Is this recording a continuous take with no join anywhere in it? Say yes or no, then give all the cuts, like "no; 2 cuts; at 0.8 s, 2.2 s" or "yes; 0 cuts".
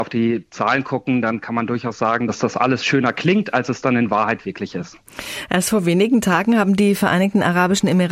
yes; 0 cuts